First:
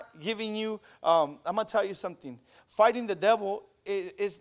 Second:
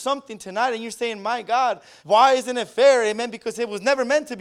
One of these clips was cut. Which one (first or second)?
second